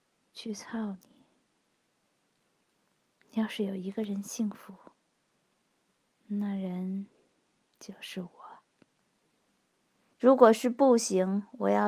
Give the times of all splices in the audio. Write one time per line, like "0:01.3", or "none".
0:10.1